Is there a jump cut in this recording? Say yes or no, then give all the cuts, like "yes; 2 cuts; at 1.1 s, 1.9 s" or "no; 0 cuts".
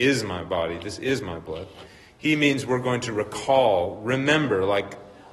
no; 0 cuts